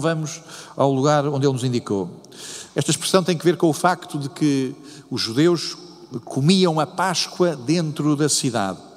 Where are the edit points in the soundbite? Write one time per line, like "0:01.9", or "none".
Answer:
0:02.7